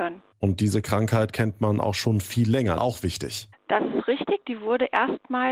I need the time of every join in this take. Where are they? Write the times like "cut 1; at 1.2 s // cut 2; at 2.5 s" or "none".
cut 1; at 2.8 s